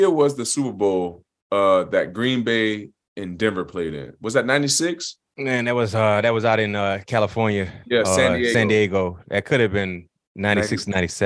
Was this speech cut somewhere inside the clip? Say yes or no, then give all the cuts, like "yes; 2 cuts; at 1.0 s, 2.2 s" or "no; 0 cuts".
no; 0 cuts